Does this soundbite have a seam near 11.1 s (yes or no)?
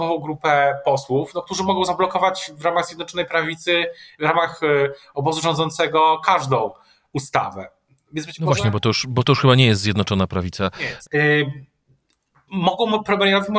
yes